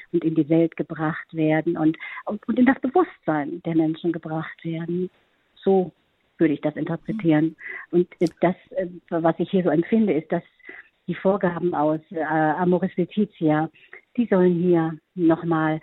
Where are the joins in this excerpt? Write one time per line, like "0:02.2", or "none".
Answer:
0:05.5